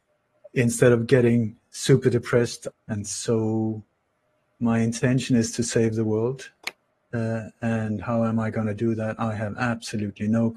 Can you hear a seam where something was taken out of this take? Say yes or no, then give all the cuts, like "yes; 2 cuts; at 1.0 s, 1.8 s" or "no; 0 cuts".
yes; 1 cut; at 2.7 s